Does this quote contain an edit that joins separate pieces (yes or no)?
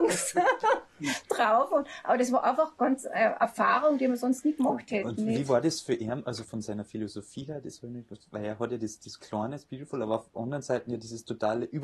yes